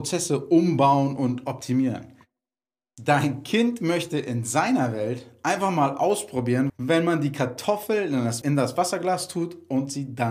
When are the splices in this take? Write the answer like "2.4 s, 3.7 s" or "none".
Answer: 6.7 s, 8.4 s